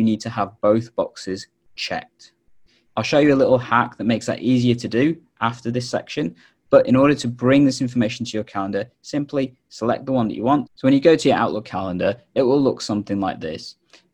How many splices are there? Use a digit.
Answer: 2